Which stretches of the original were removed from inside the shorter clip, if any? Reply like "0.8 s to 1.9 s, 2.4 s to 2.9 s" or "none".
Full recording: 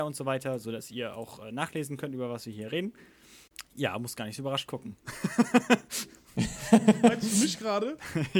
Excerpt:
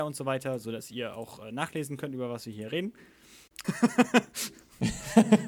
3.6 s to 5.2 s